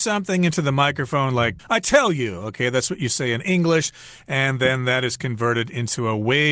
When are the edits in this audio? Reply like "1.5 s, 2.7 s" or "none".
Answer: 1.6 s